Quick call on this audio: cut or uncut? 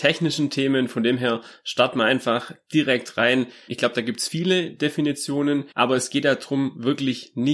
cut